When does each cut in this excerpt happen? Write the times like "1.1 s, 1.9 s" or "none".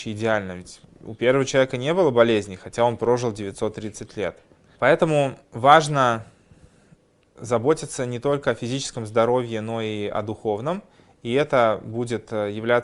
none